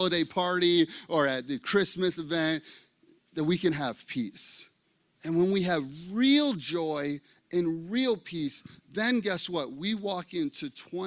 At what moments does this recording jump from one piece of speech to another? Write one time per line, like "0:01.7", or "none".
0:05.1